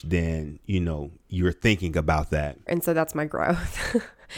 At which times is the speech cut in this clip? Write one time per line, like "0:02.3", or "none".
0:02.7